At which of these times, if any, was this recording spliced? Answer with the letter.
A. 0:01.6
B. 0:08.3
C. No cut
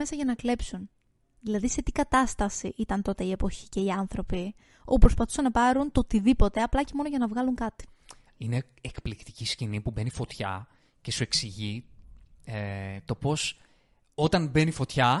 C